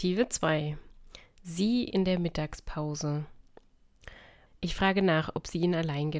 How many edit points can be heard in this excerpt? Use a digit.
1